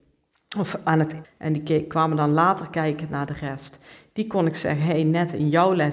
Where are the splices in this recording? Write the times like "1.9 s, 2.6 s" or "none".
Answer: 1.2 s

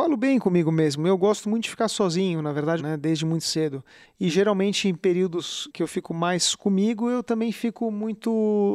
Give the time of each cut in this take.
2.8 s, 4.0 s

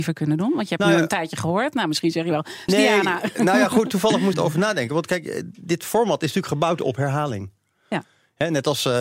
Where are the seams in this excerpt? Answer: 2.7 s, 4.3 s

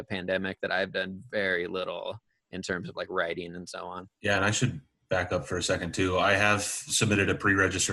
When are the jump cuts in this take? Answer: 4.1 s

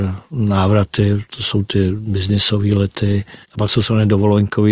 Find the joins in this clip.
3.4 s

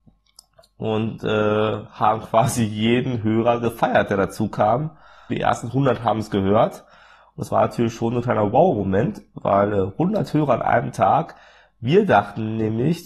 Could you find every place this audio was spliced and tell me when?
5.3 s

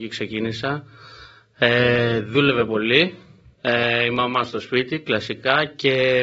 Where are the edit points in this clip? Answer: none

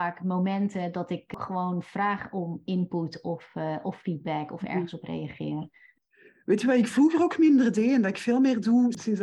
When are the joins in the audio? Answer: none

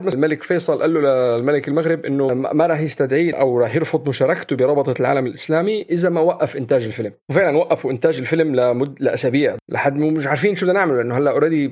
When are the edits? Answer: 7.2 s

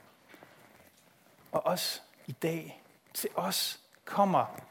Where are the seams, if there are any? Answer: none

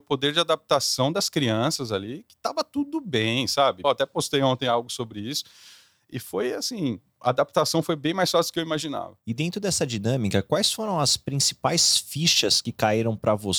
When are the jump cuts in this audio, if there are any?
3.8 s

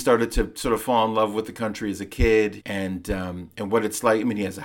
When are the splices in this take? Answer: 2.6 s

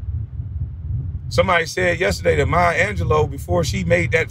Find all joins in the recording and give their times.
1.2 s

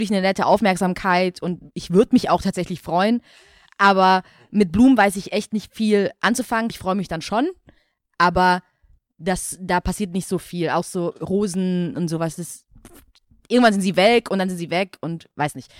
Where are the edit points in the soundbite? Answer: 6.7 s

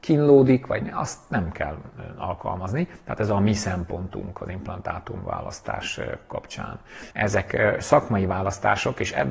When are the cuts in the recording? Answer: 7.1 s

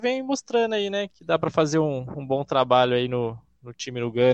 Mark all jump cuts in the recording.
1.1 s

